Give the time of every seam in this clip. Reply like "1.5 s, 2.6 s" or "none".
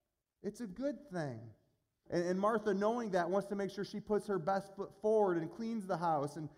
2.1 s